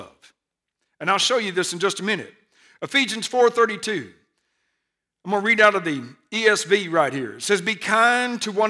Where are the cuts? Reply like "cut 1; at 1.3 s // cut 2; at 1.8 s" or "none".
none